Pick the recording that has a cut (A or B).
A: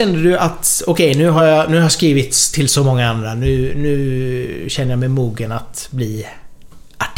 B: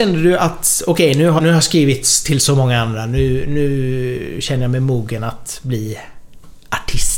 B